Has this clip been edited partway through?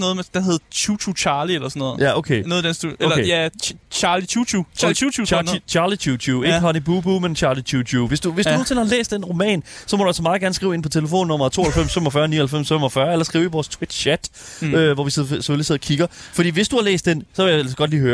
no; 0 cuts

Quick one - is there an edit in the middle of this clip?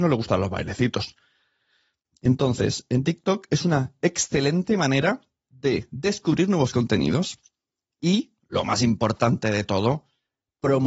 no; 0 cuts

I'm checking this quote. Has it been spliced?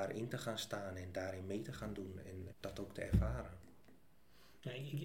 yes; 1 cut; at 2.5 s

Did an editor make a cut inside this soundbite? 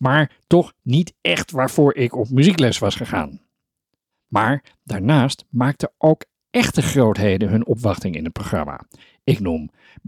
yes; 1 cut; at 4.1 s

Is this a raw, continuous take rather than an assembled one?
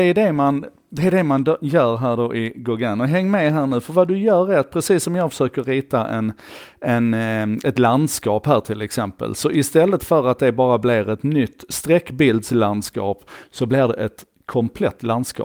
yes; 0 cuts

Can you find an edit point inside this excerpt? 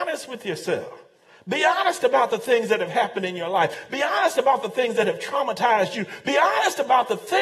no; 0 cuts

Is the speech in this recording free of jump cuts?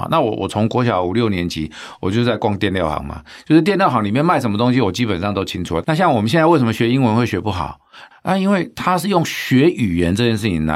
no; 2 cuts; at 5.8 s, 8.1 s

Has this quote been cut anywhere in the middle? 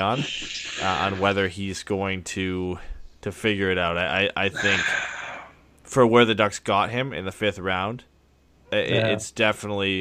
no; 0 cuts

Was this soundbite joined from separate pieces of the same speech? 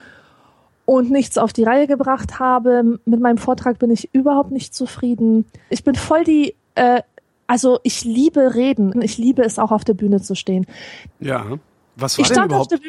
yes; 3 cuts; at 5.7 s, 8.9 s, 11.1 s

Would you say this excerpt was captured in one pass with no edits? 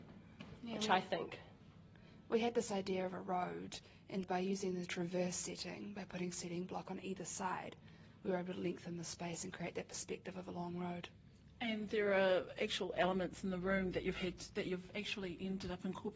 no; 1 cut; at 4.2 s

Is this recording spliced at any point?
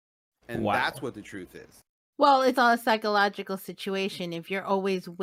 yes; 1 cut; at 2.6 s

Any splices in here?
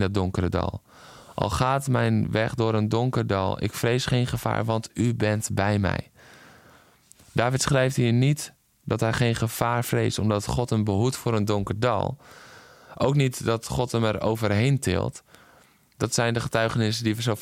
no; 0 cuts

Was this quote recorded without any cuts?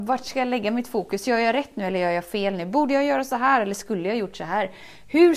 yes; 0 cuts

